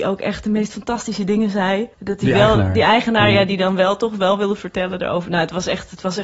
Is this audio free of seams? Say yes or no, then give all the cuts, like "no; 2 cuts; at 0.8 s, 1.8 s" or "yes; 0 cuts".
no; 1 cut; at 1.9 s